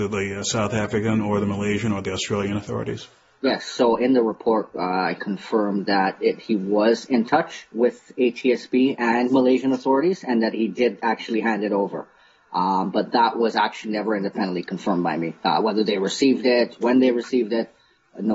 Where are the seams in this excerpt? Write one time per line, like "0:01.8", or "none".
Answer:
0:05.2